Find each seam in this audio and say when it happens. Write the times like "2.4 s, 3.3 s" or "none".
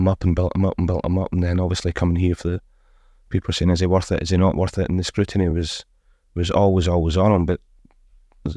none